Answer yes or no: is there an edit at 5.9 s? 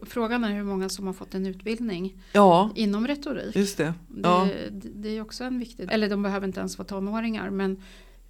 yes